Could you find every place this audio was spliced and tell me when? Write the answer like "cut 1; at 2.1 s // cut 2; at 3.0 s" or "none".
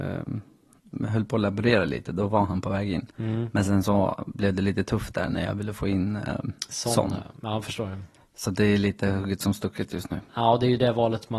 none